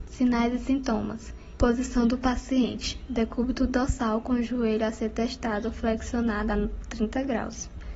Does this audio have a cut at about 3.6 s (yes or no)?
no